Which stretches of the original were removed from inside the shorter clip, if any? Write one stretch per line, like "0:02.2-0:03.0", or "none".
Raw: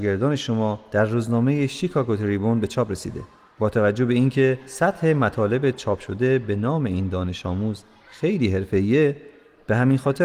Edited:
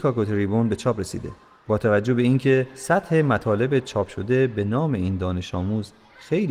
none